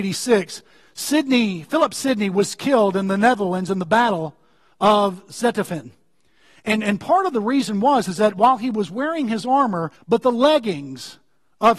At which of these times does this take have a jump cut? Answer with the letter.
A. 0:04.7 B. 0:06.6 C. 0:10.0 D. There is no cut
C